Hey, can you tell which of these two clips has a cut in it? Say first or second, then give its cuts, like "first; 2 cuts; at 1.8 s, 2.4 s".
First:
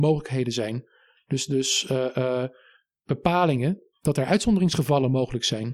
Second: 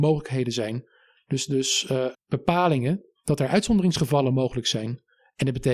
second; 1 cut; at 2.1 s